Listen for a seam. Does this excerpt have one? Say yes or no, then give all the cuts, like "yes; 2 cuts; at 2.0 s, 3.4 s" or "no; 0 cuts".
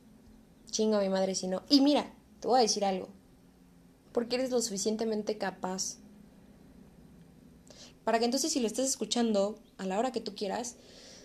yes; 2 cuts; at 4.0 s, 7.9 s